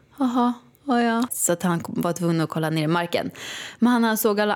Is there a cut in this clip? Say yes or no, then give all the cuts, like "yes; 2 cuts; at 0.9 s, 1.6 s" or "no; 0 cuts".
yes; 1 cut; at 1.3 s